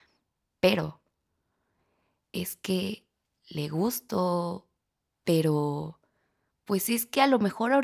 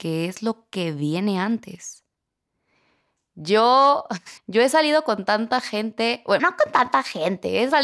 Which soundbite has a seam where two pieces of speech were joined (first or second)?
second